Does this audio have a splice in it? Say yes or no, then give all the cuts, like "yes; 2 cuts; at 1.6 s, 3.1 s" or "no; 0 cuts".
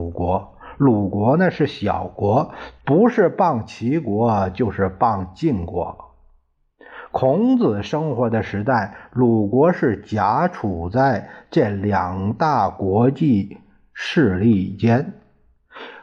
yes; 1 cut; at 2.8 s